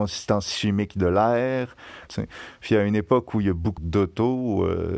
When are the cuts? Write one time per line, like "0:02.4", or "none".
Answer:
0:02.1
0:03.8

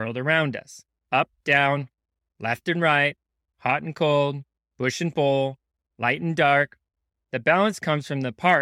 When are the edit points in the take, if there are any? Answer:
0:07.1

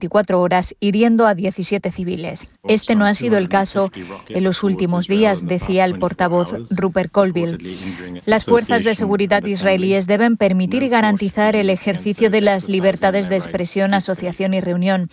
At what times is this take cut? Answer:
0:02.6
0:08.2

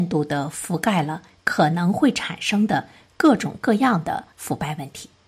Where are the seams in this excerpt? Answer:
0:04.3

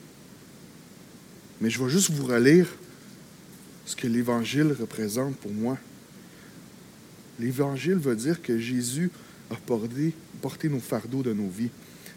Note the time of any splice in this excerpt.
0:07.2

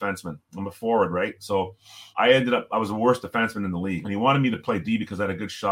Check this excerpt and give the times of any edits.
0:02.1
0:04.0

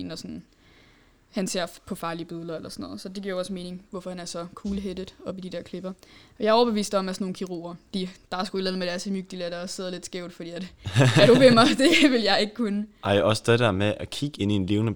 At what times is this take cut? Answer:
none

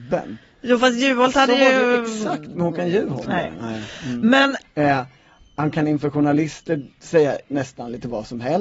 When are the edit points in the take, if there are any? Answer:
0:03.2
0:04.6

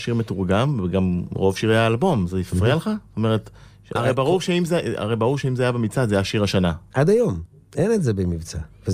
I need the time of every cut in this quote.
0:04.0
0:06.9

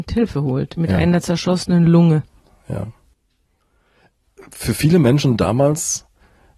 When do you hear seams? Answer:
none

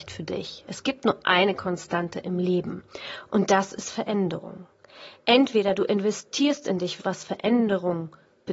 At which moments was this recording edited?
0:07.0

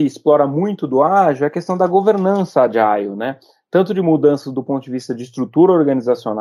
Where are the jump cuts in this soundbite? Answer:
none

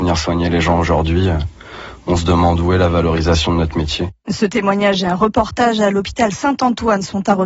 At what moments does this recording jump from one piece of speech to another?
none

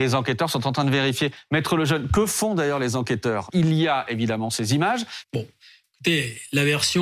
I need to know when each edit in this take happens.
0:03.5
0:05.2

